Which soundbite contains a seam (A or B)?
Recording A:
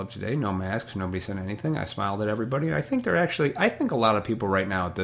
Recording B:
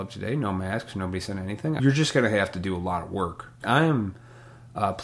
B